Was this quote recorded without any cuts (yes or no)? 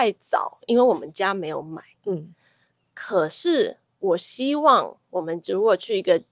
yes